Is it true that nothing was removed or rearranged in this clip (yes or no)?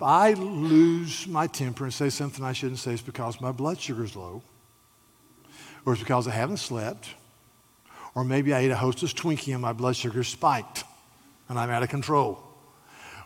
yes